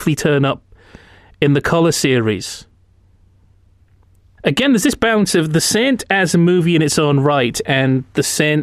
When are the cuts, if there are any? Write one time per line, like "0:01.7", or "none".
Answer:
0:04.4

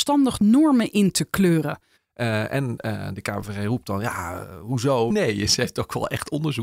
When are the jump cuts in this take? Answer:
0:01.9
0:05.1

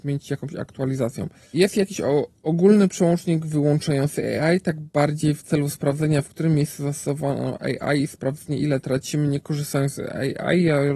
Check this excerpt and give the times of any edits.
0:01.5

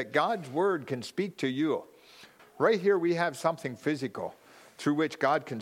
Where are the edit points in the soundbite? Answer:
0:02.4

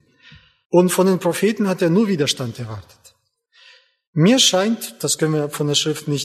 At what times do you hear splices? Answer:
none

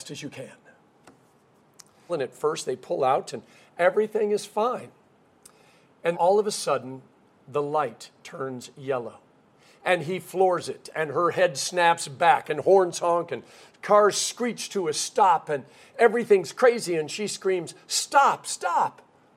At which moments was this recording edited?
0:02.1
0:06.1
0:18.4

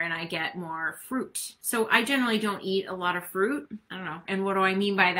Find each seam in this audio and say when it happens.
0:04.2

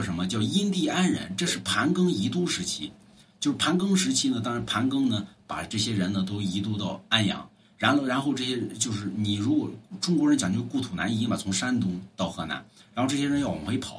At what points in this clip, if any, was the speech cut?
none

